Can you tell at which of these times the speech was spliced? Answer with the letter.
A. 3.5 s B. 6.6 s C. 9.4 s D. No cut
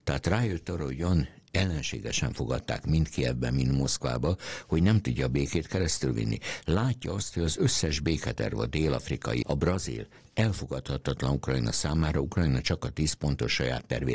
C